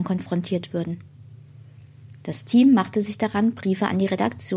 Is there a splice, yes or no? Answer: no